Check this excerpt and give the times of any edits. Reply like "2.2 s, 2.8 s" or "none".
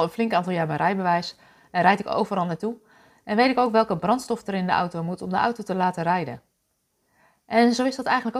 none